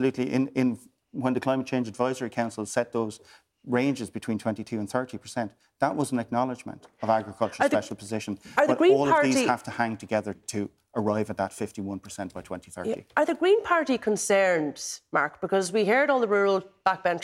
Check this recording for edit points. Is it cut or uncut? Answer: cut